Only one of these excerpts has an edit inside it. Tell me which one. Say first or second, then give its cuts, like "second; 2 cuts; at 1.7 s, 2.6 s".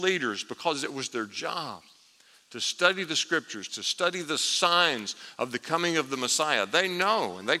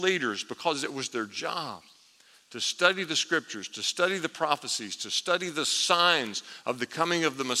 first; 1 cut; at 3.7 s